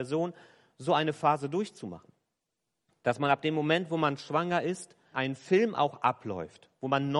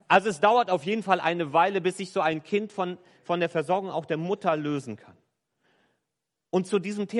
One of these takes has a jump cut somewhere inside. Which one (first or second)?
first